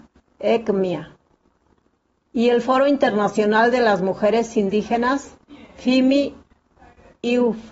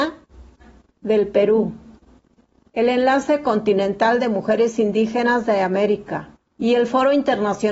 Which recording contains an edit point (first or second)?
second